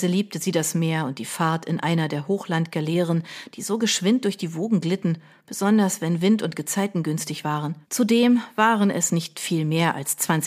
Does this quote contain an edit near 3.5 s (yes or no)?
no